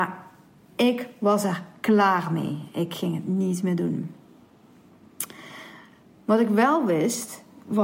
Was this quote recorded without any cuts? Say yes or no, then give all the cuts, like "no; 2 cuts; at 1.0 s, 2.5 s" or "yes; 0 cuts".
yes; 0 cuts